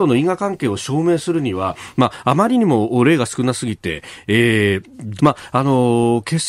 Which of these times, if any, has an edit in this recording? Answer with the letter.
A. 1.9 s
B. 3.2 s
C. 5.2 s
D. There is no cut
C